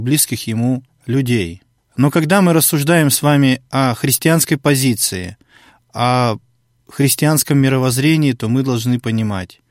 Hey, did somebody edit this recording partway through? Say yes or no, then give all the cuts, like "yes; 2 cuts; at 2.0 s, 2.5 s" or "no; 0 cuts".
no; 0 cuts